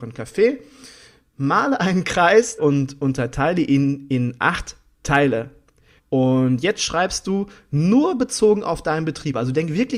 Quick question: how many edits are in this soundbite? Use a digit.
2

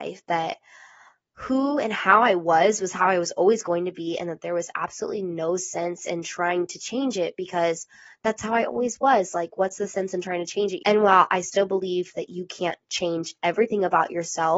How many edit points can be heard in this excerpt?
1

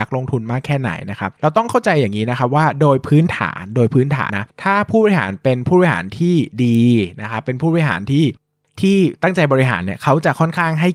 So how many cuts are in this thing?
1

